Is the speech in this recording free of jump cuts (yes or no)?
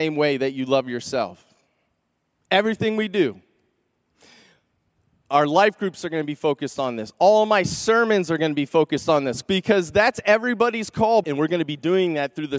no